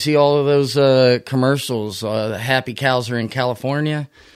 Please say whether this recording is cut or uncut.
uncut